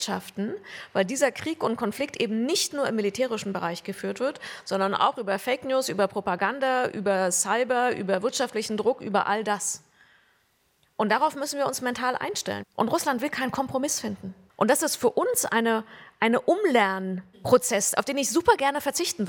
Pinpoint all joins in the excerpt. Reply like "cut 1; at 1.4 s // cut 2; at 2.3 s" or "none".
cut 1; at 12.6 s // cut 2; at 14.5 s